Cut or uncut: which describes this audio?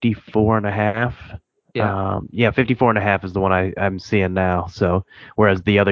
uncut